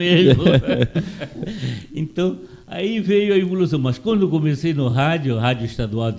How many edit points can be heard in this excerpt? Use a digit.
0